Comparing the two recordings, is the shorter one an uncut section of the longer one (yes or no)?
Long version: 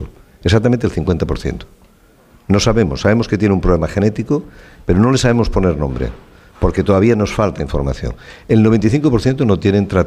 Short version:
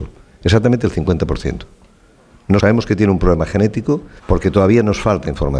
no